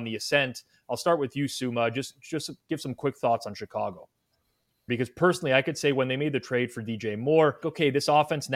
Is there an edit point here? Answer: yes; 2 cuts; at 4.9 s, 7.6 s

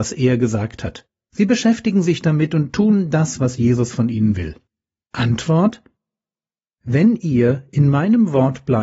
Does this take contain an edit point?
yes; 1 cut; at 5.0 s

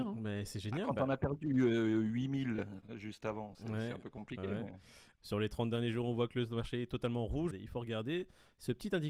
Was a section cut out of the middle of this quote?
yes; 2 cuts; at 3.5 s, 7.5 s

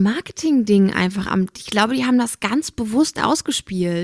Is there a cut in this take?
no; 0 cuts

